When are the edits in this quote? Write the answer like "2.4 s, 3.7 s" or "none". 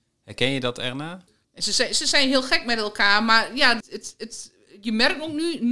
3.8 s